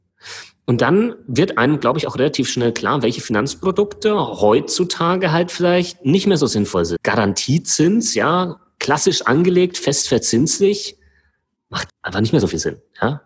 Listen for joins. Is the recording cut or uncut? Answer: cut